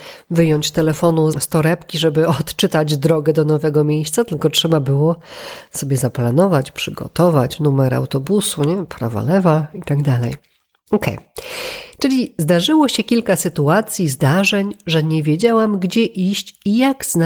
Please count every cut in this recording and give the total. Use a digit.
1